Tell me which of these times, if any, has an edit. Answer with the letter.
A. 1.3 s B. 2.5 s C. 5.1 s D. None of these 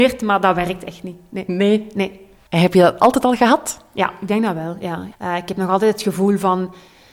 C